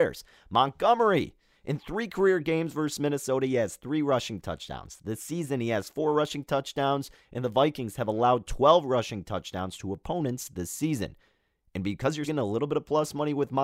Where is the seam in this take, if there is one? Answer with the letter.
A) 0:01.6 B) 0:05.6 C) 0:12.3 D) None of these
C